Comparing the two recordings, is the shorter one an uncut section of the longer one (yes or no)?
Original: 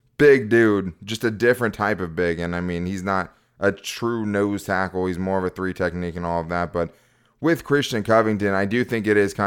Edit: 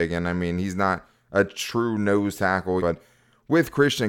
no